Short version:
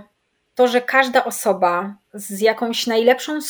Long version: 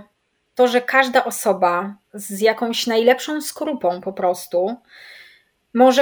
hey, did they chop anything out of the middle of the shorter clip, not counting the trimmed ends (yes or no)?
no